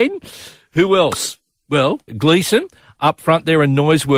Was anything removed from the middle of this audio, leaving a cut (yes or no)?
yes